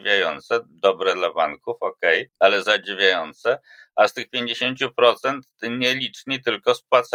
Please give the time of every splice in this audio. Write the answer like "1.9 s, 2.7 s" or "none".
2.3 s